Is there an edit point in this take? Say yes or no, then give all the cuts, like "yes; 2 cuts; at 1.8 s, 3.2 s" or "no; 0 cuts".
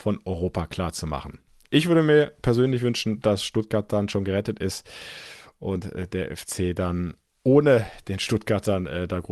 no; 0 cuts